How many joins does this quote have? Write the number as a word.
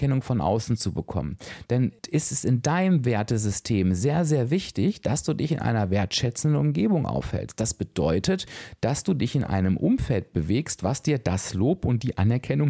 one